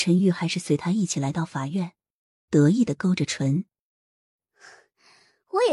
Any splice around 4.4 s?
no; 1 cut; at 2.5 s

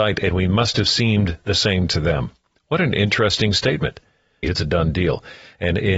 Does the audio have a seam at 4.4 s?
yes; 1 cut; at 4.4 s

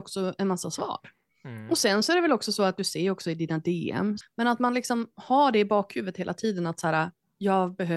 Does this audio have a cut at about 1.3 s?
no; 1 cut; at 4.2 s

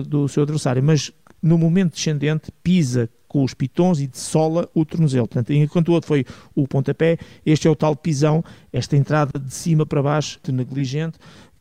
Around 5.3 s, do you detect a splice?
no; 1 cut; at 10.4 s

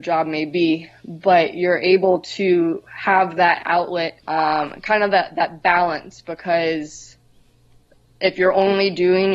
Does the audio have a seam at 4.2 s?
yes; 1 cut; at 4.2 s

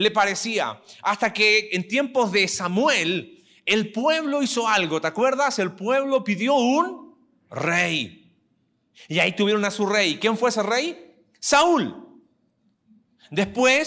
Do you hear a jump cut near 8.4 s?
no; 0 cuts

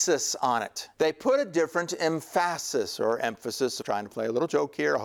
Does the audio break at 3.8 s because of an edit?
yes; 2 cuts; at 0.9 s, 3.8 s

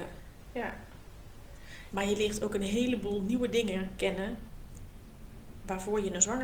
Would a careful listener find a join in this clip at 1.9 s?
yes; 1 cut; at 1.9 s

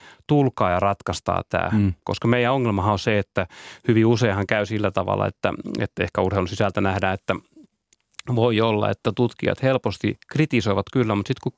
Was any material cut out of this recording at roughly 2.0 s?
yes; 1 cut; at 2.0 s

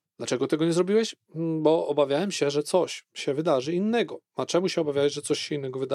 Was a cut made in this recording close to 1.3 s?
no; 0 cuts

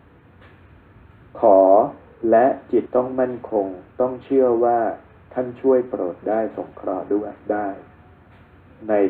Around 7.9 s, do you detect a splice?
no; 1 cut; at 2.9 s

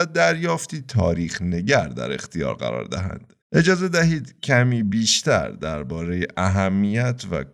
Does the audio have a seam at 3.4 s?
yes; 1 cut; at 3.4 s

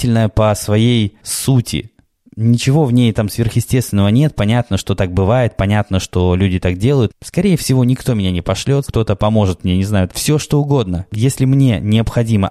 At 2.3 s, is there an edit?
no; 3 cuts; at 7.1 s, 8.8 s, 10.1 s

